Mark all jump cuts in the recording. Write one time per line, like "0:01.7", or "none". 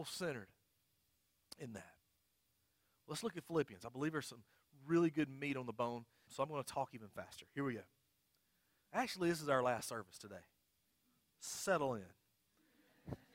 0:06.3